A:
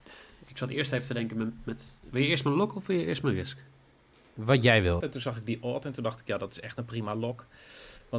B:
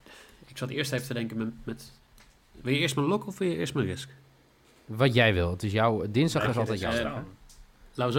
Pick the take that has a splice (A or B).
A